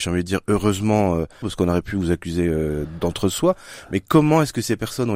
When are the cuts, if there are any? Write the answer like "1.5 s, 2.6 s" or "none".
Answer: 1.4 s